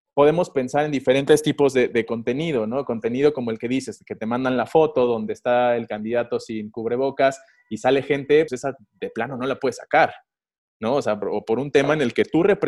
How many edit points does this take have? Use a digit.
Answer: 2